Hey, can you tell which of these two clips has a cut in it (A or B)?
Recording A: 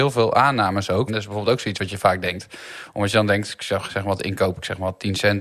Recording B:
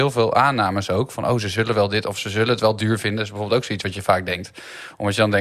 A